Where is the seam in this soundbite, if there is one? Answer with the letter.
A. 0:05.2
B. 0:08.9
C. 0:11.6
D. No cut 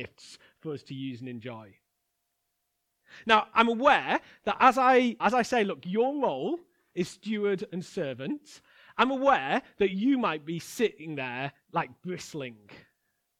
A